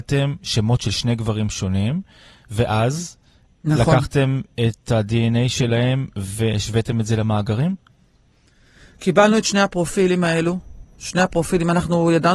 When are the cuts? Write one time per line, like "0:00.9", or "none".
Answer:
none